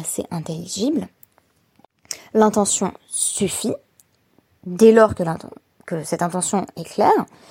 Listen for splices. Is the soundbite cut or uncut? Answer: uncut